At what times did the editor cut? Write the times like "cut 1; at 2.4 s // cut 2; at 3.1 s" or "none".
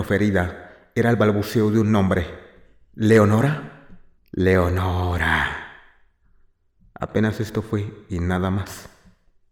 cut 1; at 4.2 s